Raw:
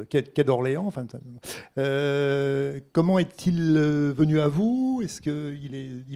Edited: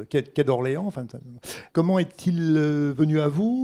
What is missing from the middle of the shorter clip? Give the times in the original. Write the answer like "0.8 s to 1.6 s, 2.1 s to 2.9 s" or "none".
1.7 s to 2.9 s

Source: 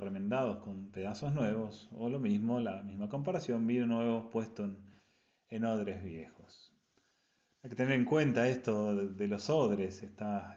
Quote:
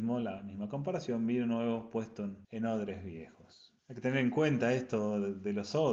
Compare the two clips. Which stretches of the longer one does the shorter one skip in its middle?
4.8 s to 5.4 s, 6.8 s to 7.5 s

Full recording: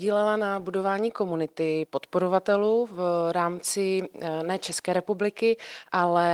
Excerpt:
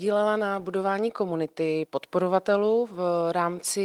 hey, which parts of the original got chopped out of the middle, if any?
none

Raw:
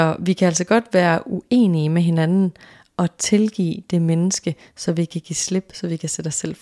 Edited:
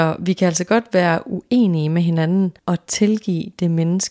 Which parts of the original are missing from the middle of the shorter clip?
2.6 s to 2.9 s

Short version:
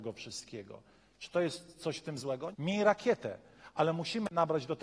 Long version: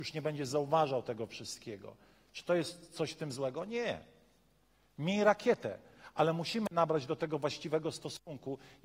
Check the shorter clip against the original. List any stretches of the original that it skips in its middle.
3.7 s to 4.9 s

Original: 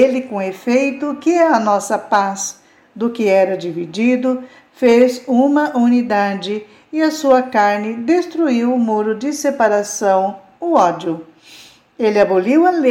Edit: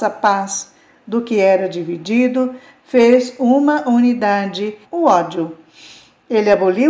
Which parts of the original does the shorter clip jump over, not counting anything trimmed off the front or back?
6.7 s to 10.5 s

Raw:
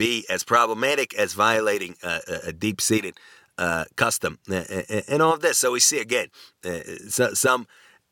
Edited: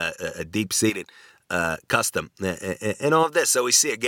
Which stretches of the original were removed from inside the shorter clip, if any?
none

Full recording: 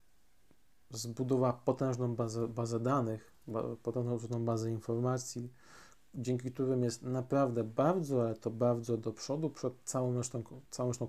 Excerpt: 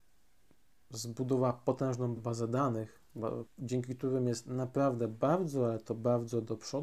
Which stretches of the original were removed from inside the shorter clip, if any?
2.2 s to 2.5 s, 3.8 s to 6.0 s

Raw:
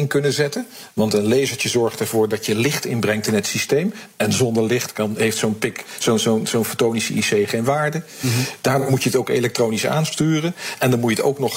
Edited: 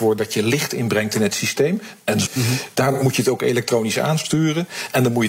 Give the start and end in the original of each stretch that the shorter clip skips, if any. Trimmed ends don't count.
4.4 s to 8.1 s

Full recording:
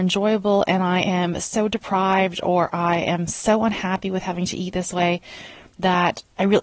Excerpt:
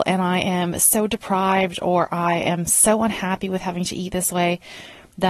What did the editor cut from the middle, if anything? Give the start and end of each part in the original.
none

